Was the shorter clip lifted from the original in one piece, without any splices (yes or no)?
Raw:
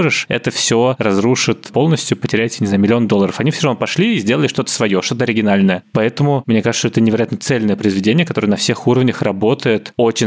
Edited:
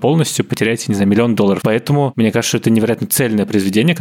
no